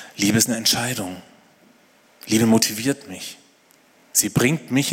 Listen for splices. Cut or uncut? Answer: uncut